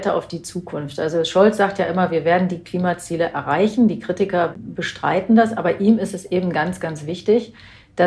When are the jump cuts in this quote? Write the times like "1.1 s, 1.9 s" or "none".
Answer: none

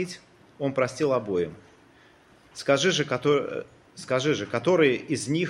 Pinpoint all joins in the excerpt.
3.9 s

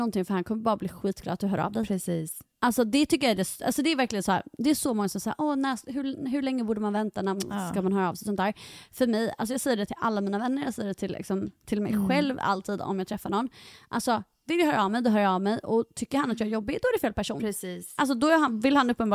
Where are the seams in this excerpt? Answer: none

